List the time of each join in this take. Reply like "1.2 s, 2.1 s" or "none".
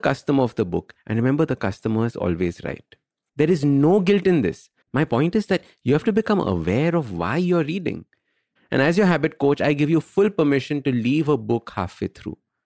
3.3 s, 4.8 s, 8.6 s